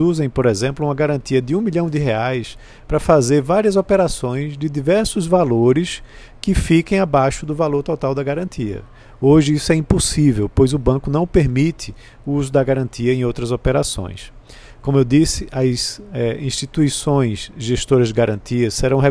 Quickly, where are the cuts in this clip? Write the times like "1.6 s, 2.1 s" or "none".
none